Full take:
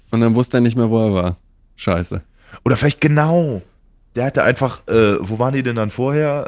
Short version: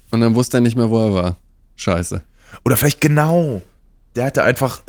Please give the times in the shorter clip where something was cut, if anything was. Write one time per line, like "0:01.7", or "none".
none